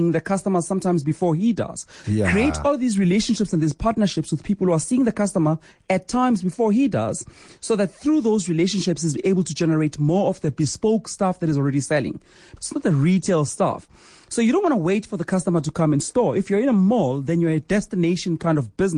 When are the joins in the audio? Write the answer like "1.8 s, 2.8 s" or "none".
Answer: 2.0 s, 12.6 s